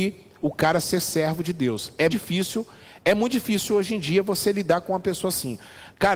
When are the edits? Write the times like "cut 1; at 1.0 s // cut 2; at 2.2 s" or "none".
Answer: cut 1; at 2.1 s